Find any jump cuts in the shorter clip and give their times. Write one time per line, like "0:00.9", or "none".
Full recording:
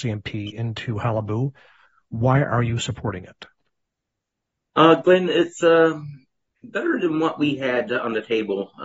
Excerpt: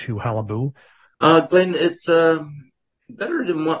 0:01.1